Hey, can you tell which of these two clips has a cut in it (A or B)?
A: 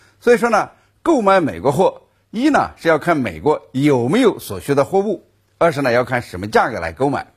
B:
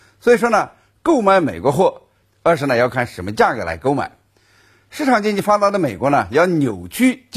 B